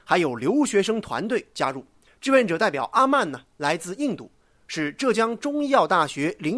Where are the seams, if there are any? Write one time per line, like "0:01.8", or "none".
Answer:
0:02.1